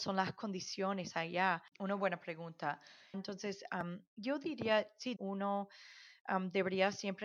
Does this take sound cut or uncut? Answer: cut